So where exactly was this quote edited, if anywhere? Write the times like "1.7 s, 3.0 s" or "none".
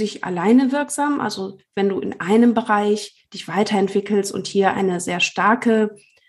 none